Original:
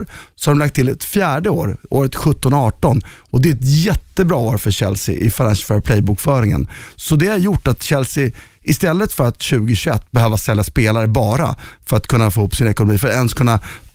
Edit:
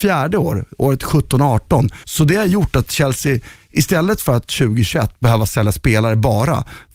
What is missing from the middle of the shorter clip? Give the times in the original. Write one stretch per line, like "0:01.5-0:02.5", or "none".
0:03.2-0:06.9